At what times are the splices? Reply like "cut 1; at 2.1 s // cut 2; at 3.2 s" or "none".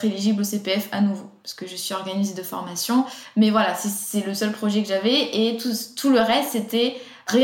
none